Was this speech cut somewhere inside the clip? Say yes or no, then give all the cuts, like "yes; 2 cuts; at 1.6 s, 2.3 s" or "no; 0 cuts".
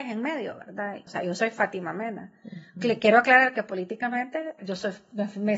yes; 2 cuts; at 1.1 s, 4.6 s